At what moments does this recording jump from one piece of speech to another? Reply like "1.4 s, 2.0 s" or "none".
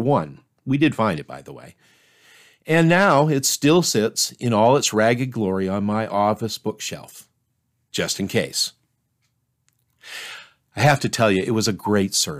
none